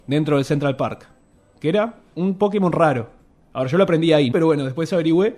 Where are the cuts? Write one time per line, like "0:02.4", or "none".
0:04.3

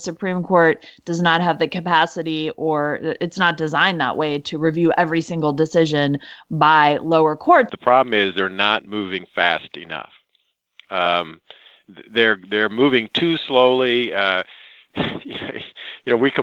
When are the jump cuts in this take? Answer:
0:07.7

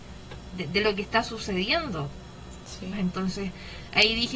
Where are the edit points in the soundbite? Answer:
0:02.9

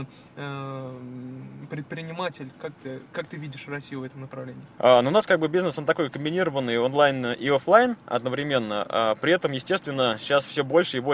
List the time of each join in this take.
0:04.7

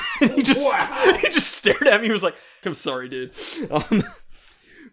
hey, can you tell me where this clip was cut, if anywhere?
0:02.6

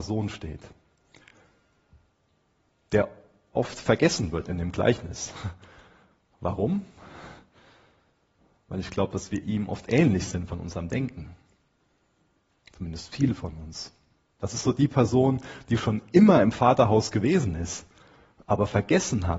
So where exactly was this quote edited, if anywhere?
none

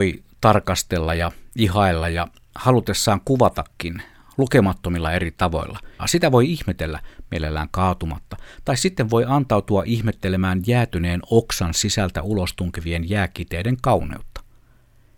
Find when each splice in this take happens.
0:06.0

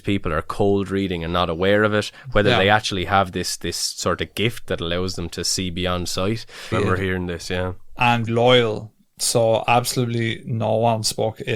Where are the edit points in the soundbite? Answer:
0:06.7
0:08.3

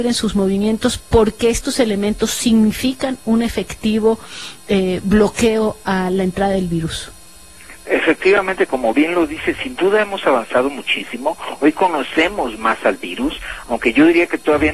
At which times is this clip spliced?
none

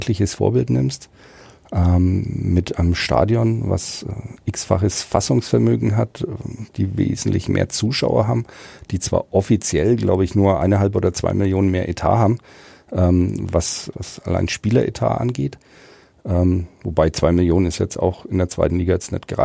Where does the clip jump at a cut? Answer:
0:13.9

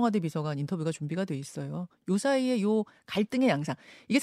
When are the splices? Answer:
none

